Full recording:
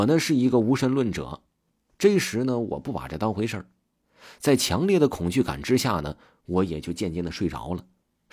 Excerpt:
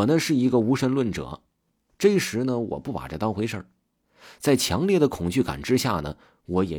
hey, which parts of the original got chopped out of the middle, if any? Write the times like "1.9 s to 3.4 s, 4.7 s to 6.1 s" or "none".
none